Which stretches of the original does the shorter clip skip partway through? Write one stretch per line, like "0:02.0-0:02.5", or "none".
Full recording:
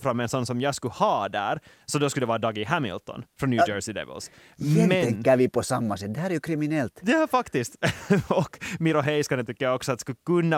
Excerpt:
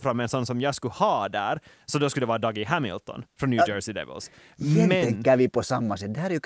none

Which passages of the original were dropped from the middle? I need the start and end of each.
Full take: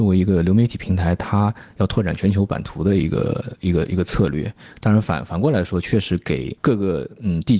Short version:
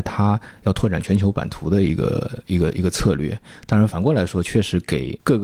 0:05.0-0:05.3

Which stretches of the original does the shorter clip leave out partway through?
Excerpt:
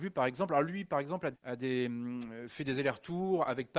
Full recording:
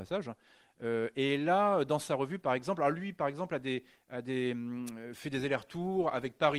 0:03.6-0:04.0

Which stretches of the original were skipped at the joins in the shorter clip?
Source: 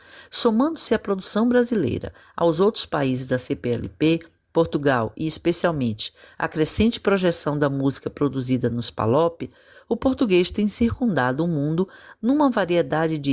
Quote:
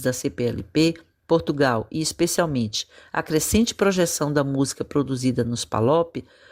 none

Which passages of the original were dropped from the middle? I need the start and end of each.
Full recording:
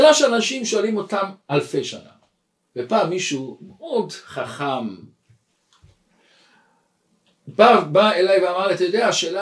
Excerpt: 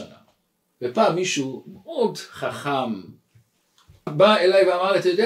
0:06.0-0:07.8

